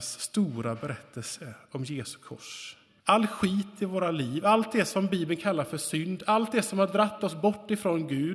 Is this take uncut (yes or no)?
no